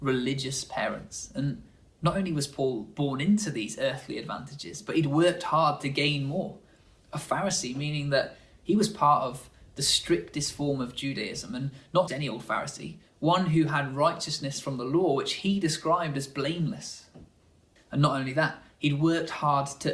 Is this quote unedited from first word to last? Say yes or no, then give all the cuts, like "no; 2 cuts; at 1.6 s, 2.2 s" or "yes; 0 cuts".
no; 2 cuts; at 12.1 s, 17.8 s